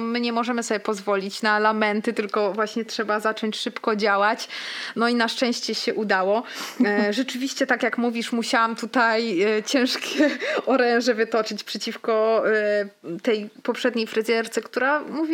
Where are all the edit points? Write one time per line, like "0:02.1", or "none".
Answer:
none